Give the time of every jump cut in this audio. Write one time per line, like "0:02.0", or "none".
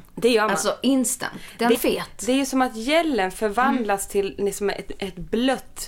0:01.7